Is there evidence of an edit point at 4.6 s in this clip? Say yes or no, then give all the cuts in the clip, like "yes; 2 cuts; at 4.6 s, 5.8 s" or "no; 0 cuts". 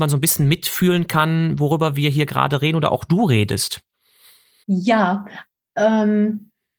yes; 1 cut; at 4.6 s